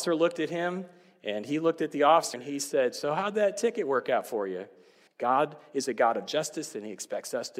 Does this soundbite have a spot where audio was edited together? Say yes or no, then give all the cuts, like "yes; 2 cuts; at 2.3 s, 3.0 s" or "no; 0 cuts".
yes; 2 cuts; at 2.3 s, 5.1 s